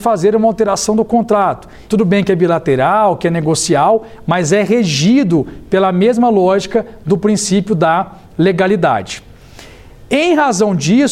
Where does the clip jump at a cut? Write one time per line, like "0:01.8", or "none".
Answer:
0:01.9